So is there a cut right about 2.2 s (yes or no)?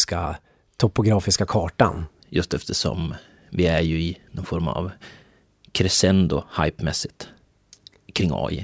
yes